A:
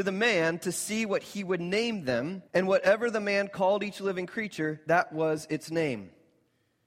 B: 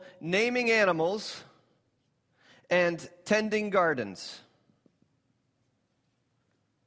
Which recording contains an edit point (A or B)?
A